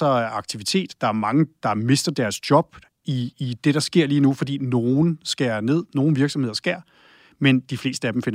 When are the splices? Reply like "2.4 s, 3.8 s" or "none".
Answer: none